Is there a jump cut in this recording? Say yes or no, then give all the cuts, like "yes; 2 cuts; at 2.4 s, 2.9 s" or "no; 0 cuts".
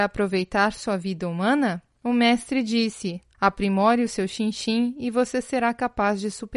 yes; 1 cut; at 3.3 s